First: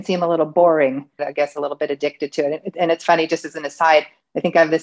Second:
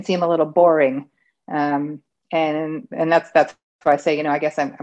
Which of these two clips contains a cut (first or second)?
first